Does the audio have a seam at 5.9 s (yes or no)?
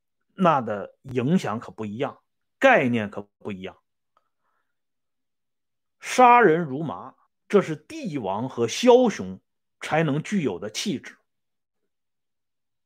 no